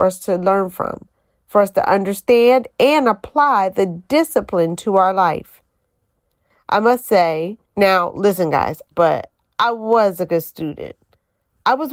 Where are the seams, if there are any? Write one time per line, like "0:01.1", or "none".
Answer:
0:07.7
0:08.9